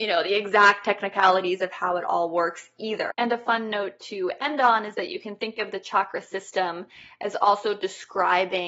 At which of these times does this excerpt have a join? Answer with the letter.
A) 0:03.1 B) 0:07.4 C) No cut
A